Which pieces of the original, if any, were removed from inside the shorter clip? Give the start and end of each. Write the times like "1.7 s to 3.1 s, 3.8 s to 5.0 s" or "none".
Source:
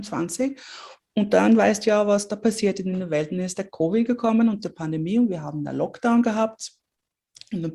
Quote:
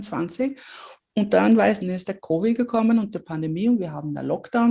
1.8 s to 3.3 s